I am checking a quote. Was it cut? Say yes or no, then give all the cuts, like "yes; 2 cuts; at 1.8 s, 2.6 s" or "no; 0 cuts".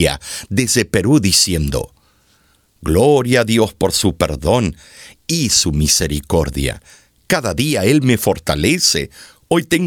no; 0 cuts